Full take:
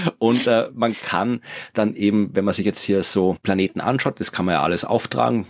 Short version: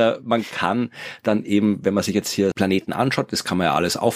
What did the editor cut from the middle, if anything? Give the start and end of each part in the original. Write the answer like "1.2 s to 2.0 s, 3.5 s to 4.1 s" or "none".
3.0 s to 3.4 s